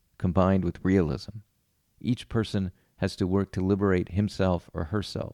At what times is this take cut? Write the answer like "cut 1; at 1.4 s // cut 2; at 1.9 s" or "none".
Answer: none